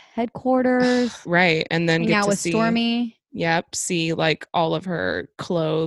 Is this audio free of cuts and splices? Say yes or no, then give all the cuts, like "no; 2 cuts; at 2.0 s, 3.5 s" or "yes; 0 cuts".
no; 1 cut; at 1.2 s